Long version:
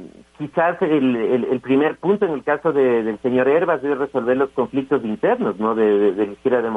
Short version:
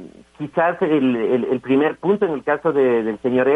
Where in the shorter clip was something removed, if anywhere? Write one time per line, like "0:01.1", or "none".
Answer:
none